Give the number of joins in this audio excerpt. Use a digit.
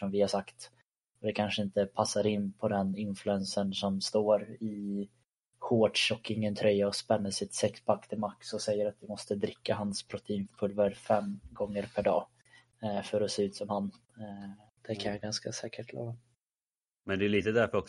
1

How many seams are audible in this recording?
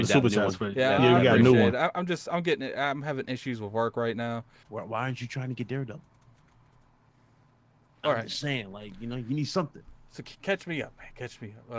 1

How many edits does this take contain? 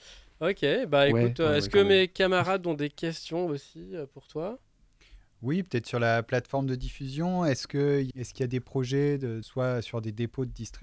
2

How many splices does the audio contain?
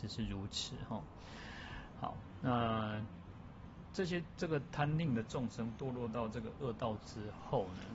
1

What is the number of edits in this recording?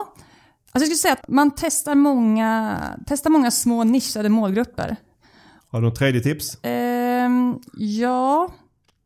2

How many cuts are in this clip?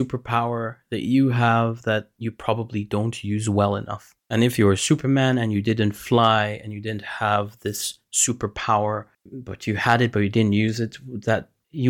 0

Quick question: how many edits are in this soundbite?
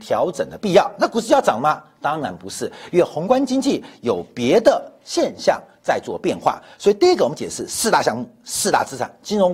0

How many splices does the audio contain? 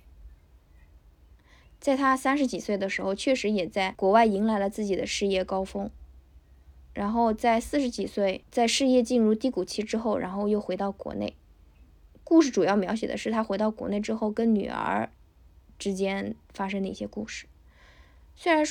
0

